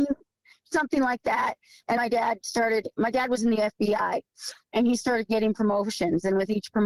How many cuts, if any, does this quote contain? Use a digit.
1